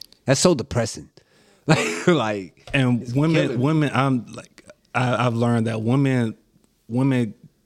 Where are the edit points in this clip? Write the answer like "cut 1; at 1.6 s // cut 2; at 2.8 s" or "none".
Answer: none